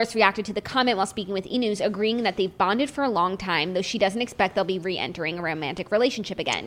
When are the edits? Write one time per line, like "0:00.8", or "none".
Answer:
none